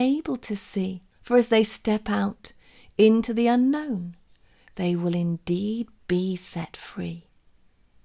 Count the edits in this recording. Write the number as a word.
one